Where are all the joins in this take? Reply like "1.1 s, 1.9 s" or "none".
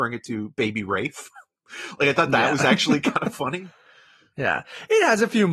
none